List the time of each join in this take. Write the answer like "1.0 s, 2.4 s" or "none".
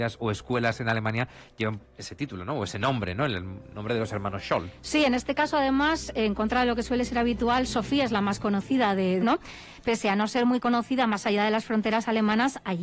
9.2 s